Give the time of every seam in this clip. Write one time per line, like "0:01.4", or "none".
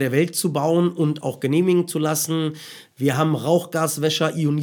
none

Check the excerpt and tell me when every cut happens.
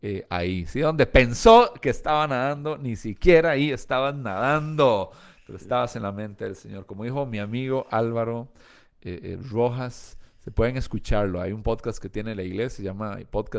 none

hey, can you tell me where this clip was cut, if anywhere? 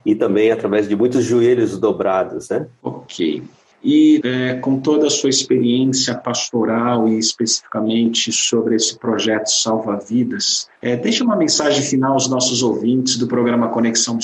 0:02.8
0:04.2
0:10.8

